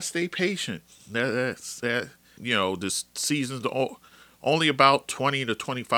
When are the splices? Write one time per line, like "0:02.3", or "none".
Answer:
0:02.4